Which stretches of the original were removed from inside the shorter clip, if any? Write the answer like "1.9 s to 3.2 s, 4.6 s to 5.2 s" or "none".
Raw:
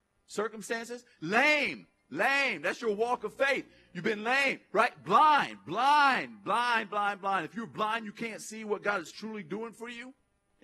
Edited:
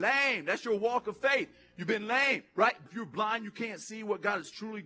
5.0 s to 7.5 s